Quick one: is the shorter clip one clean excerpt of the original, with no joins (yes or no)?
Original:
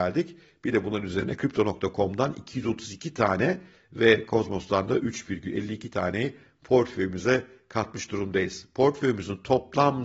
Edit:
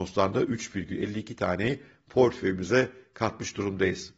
yes